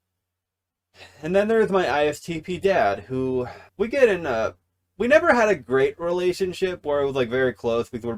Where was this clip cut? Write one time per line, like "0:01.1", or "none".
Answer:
0:03.7